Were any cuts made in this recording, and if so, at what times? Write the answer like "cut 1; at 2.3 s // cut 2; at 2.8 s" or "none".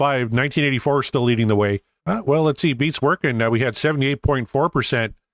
cut 1; at 2.0 s